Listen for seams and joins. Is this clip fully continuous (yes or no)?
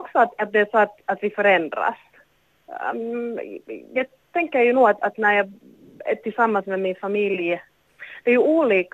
yes